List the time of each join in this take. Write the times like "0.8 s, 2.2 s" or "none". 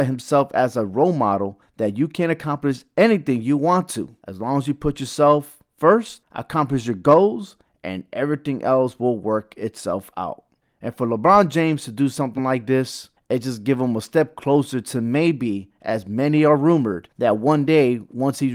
none